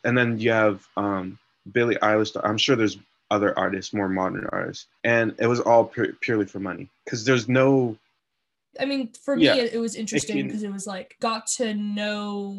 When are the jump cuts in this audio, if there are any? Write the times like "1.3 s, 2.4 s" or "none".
5.0 s, 8.7 s, 11.2 s